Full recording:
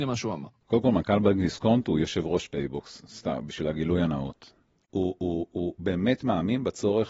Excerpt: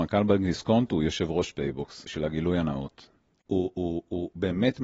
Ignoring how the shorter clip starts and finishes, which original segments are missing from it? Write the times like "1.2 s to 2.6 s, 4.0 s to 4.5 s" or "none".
3.0 s to 3.5 s

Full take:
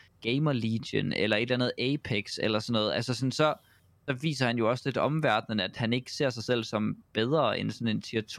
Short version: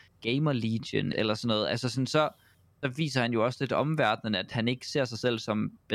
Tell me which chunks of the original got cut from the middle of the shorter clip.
1.1 s to 2.4 s

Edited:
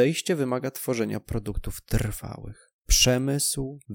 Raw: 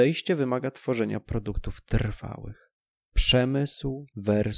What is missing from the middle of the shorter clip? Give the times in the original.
2.8 s to 3.1 s

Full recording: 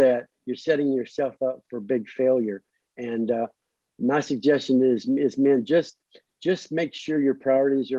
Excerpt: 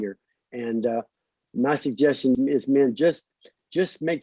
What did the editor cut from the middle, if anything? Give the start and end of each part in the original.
4.8 s to 5.0 s

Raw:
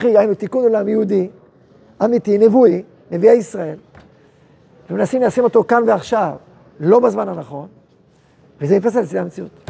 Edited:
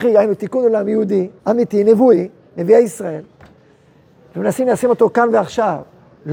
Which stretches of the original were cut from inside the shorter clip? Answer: 1.4 s to 1.9 s

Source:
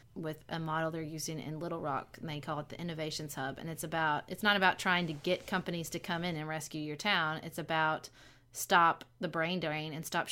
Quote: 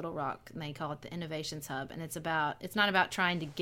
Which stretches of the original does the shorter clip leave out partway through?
none

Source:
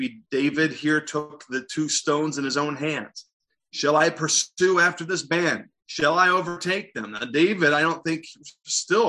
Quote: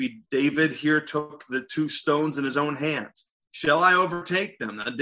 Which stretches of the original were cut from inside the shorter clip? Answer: 3.5 s to 5.8 s

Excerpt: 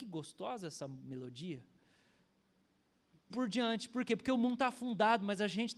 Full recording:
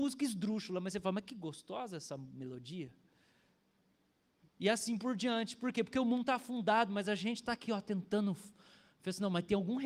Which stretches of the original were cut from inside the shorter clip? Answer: 4.6 s to 5.0 s

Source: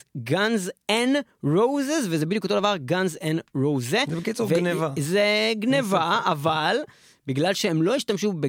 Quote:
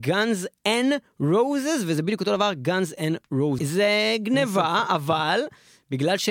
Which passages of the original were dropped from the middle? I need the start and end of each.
3.8 s to 4.9 s

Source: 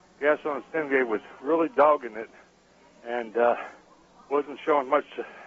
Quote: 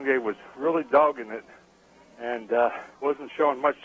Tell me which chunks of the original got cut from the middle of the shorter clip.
3.8 s to 4.2 s

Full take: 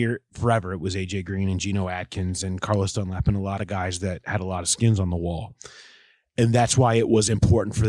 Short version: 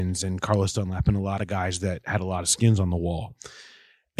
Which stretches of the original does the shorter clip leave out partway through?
none

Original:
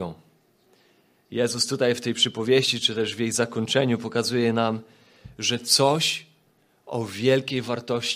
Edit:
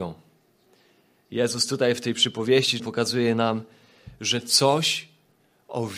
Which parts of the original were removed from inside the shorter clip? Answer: 2.8 s to 4.0 s

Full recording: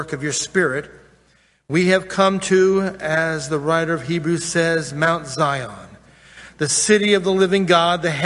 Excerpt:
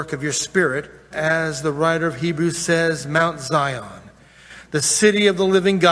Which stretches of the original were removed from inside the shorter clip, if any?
1.1 s to 3.0 s

